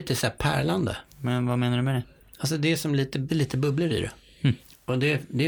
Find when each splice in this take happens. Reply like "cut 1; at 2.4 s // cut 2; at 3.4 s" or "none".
cut 1; at 3.3 s